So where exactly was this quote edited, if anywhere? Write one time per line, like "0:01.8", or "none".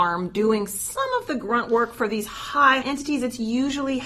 0:02.8